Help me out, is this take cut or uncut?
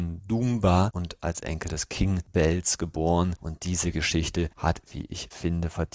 cut